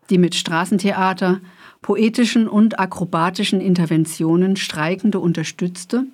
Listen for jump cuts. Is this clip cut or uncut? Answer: uncut